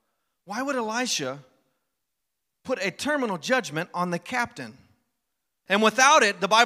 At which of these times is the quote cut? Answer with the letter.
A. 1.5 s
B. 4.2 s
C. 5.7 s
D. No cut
C